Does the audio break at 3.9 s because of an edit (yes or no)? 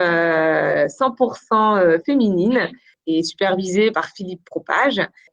yes